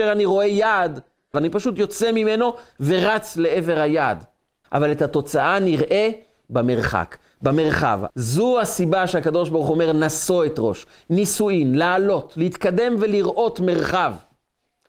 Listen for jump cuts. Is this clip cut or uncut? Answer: cut